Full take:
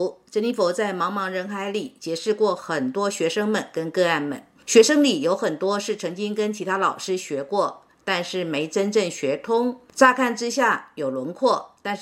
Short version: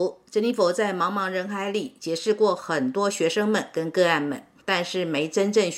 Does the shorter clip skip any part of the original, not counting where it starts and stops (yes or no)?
yes